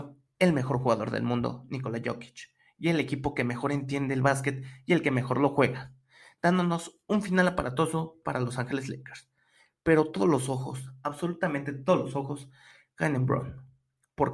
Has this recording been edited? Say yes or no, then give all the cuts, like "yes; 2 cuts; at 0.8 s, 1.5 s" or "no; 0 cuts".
no; 0 cuts